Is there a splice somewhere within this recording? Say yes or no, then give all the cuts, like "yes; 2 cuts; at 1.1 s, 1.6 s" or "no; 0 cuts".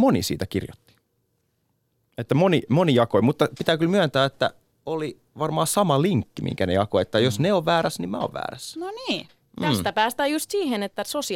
no; 0 cuts